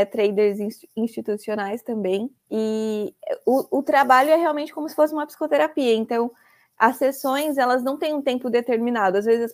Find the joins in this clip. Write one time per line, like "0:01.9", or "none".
0:02.4